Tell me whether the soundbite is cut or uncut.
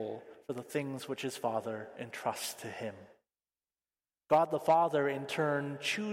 uncut